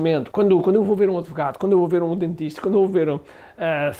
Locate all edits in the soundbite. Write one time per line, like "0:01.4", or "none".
none